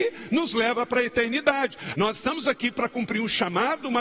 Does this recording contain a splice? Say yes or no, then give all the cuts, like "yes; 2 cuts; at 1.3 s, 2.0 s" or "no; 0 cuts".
yes; 1 cut; at 1.9 s